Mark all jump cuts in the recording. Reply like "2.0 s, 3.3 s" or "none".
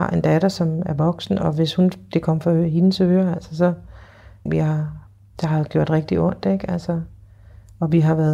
4.5 s